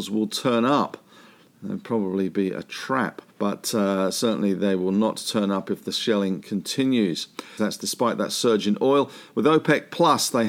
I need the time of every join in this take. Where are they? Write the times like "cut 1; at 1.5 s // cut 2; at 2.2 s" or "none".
cut 1; at 3.3 s // cut 2; at 7.6 s